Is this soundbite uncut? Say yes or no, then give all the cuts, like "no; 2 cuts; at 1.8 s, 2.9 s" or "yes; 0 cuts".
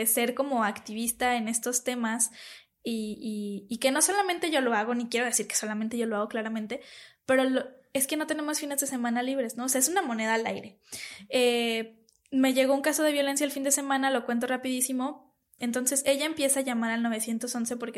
no; 1 cut; at 15.6 s